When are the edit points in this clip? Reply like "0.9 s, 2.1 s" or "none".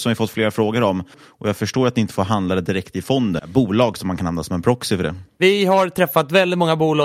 1.1 s, 3.4 s